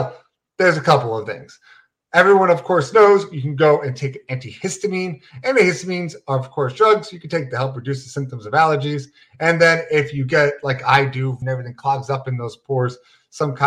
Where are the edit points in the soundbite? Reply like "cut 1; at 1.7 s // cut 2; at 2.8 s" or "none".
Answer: cut 1; at 11.4 s